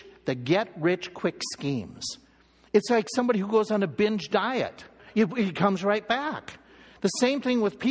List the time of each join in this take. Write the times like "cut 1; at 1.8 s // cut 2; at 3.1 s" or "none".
cut 1; at 2.6 s // cut 2; at 5.0 s